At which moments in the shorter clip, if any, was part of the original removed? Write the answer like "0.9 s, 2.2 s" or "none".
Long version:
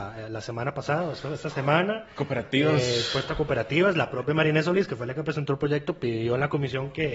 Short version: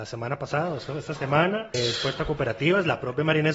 1.7 s